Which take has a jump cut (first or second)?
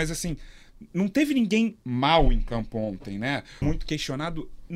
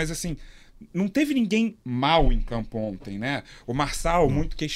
first